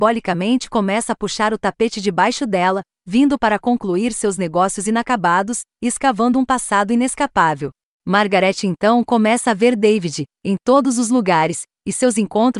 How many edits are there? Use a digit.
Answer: 2